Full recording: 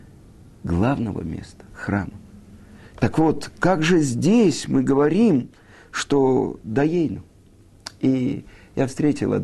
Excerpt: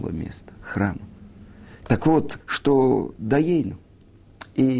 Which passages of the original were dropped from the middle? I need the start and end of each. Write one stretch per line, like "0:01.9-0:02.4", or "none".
0:03.5-0:05.9